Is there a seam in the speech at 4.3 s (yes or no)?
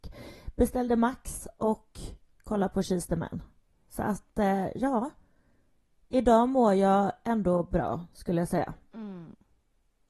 no